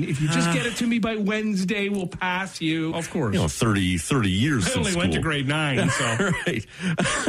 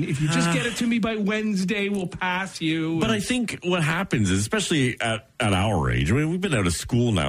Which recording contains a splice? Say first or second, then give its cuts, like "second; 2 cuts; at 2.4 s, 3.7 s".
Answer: first; 1 cut; at 2.9 s